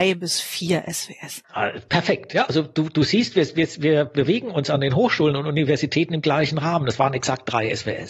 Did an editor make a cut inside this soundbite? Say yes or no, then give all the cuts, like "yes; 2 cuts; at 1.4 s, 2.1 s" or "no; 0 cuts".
no; 0 cuts